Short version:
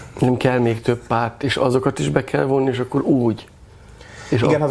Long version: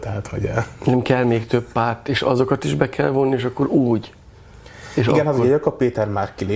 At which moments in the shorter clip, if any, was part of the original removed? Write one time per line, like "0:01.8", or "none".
none